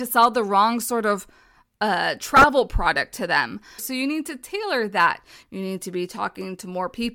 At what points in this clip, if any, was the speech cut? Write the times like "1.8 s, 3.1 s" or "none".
3.8 s, 5.4 s